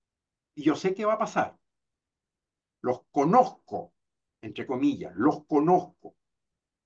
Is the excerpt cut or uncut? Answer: uncut